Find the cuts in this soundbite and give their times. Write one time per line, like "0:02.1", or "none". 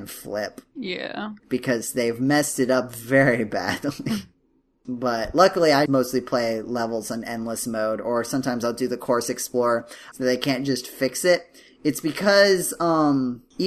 0:01.4
0:05.9
0:10.1